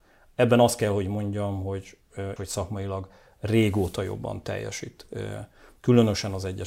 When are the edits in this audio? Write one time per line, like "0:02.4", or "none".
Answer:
0:02.4

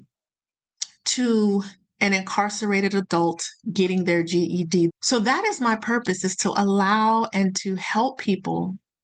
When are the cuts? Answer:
0:04.9

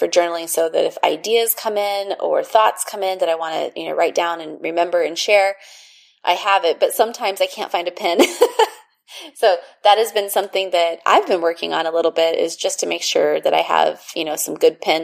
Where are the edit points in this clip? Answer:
none

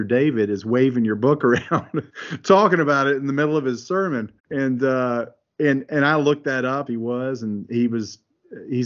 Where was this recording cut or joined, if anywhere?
0:04.4
0:06.9

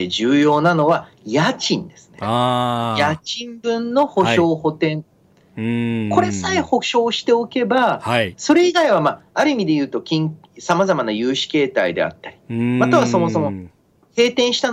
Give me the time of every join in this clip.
none

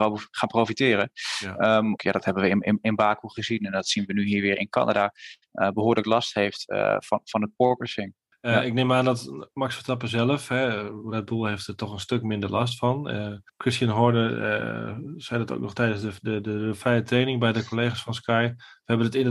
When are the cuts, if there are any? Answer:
0:02.0

